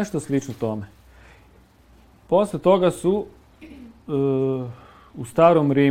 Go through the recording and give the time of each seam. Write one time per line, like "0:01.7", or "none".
none